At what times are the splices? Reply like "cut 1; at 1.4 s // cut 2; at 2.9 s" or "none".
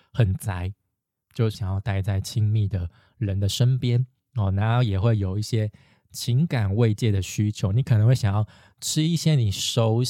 cut 1; at 1.5 s